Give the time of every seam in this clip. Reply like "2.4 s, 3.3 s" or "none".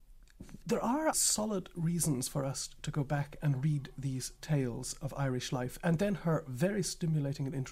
1.1 s